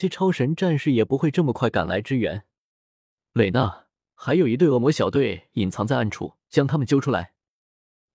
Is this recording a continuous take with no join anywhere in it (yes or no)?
no